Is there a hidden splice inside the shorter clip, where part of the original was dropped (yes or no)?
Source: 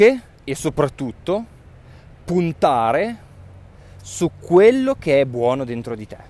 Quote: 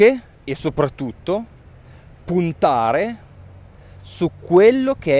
no